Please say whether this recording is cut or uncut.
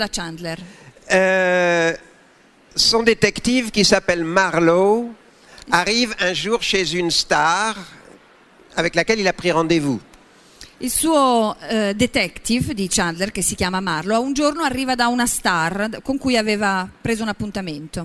uncut